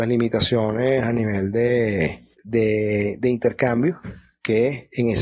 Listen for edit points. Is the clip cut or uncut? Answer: cut